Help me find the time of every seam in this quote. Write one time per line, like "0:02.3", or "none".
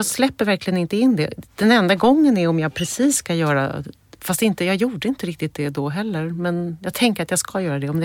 0:01.5